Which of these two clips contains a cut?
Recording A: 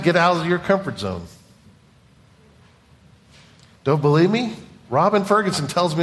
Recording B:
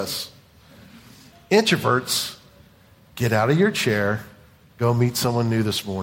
B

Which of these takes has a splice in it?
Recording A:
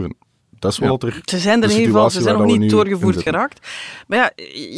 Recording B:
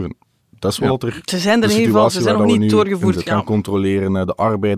B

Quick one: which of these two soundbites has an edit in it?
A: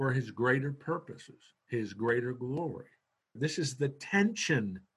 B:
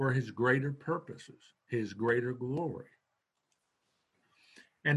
A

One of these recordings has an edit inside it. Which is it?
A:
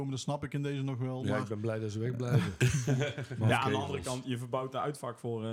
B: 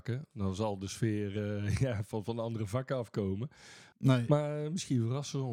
B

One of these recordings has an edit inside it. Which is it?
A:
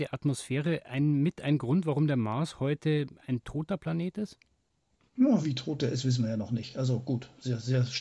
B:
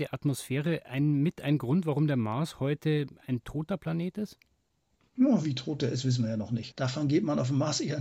B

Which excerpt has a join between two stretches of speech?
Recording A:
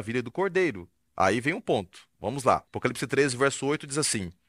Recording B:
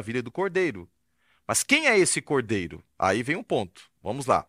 A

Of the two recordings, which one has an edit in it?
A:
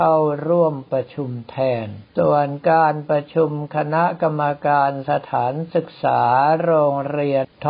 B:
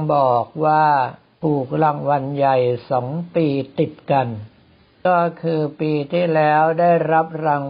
A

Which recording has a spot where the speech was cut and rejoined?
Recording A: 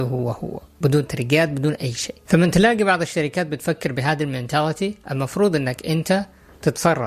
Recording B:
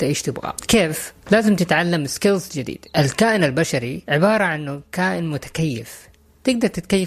B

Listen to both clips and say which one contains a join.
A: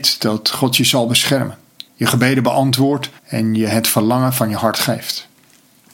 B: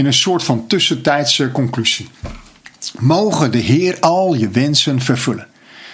A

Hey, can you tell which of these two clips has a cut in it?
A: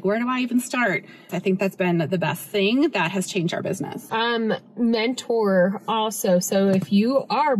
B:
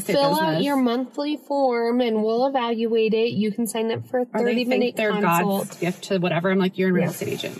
A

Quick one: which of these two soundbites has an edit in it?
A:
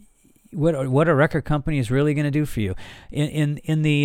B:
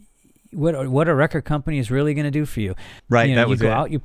B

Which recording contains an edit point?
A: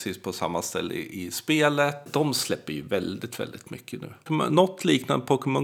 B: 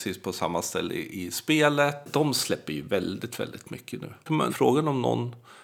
B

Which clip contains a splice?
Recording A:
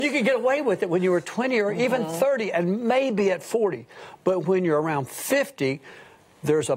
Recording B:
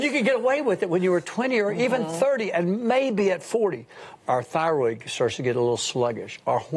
B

